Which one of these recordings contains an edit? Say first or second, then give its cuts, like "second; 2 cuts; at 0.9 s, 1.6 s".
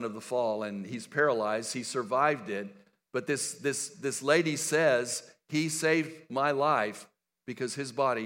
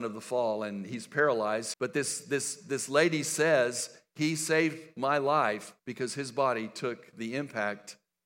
second; 2 cuts; at 1.7 s, 5.8 s